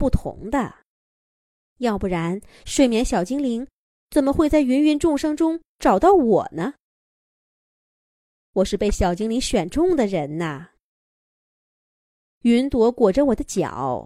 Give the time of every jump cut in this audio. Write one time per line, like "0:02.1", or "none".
0:12.2

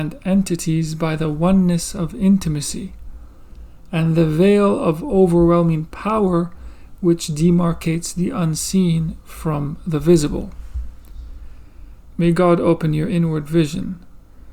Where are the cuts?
0:12.1

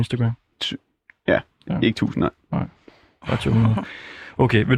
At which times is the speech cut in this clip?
none

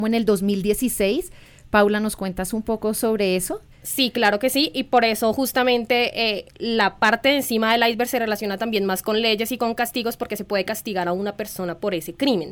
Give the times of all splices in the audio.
0:03.7

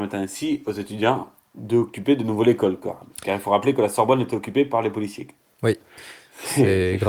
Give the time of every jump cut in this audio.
none

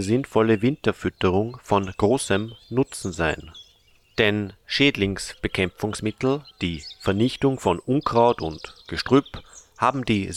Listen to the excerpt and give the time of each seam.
0:06.5

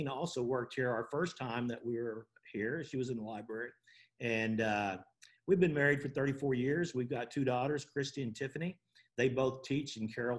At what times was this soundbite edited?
none

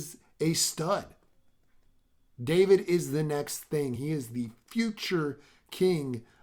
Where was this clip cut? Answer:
0:04.0

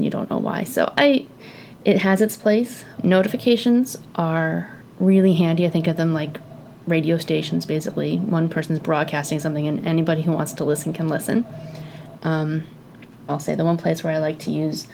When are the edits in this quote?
0:03.0
0:12.2
0:13.3

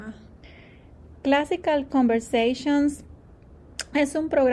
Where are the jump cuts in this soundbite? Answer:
none

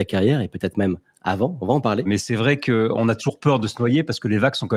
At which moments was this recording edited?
0:02.0

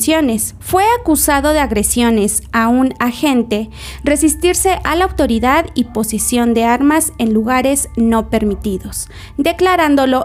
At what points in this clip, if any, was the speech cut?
none

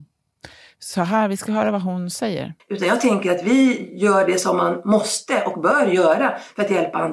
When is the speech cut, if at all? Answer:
0:02.6

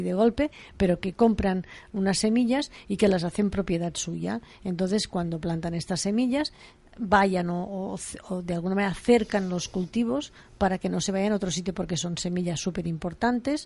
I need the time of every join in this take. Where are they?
none

